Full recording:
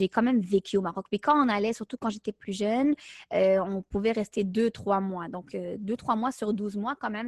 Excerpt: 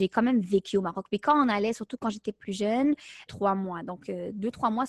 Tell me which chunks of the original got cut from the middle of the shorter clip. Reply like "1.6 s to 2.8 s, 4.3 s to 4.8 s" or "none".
3.3 s to 4.7 s